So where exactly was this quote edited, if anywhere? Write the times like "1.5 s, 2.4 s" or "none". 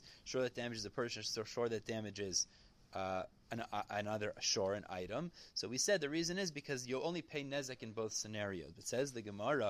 none